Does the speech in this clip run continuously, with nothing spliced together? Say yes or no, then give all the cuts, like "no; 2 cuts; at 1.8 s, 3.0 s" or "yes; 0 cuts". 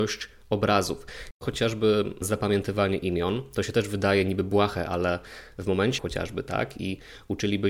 no; 2 cuts; at 1.3 s, 6.0 s